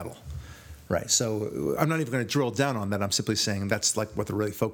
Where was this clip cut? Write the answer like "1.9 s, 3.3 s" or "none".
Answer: none